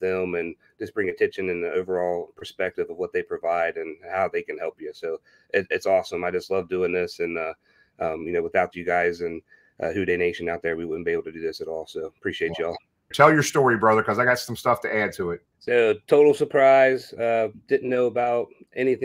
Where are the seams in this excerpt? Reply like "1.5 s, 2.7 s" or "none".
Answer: 13.1 s, 15.5 s